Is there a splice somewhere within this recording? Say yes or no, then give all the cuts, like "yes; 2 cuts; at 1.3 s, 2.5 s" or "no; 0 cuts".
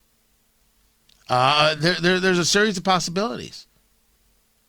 no; 0 cuts